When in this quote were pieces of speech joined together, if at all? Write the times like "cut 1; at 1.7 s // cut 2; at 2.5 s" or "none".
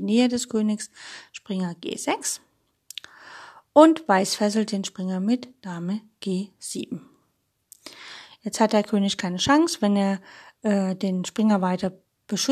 none